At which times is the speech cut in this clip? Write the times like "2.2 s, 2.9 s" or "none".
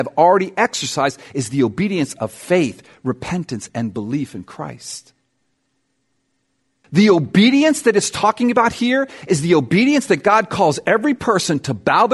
6.8 s